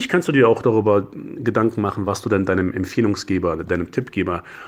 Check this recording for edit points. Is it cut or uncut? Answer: uncut